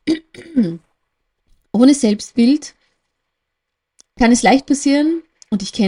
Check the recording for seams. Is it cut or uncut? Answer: uncut